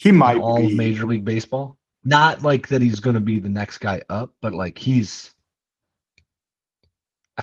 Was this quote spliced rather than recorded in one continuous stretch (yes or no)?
yes